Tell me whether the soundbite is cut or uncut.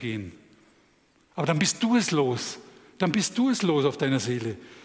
uncut